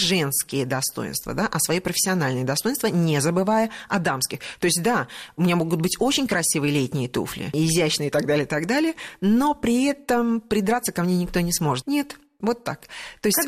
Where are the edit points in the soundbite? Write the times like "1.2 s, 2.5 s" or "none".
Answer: 11.8 s